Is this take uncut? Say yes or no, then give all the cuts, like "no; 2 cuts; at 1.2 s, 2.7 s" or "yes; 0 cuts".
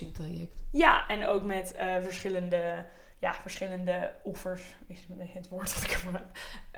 yes; 0 cuts